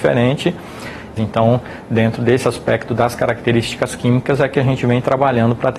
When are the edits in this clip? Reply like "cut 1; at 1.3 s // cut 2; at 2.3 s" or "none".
cut 1; at 1.2 s